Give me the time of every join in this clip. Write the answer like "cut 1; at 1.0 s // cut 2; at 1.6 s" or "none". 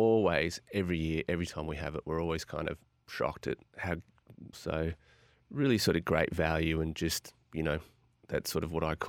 cut 1; at 4.5 s